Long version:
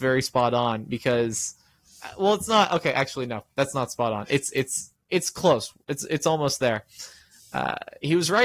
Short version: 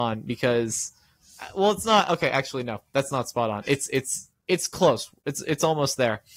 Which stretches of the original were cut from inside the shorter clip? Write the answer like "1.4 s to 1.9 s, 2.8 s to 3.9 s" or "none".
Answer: none